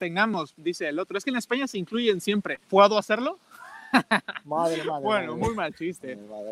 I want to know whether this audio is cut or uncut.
cut